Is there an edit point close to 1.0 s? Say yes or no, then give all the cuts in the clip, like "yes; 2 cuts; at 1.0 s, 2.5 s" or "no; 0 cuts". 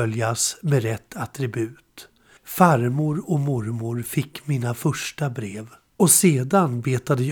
no; 1 cut; at 2.4 s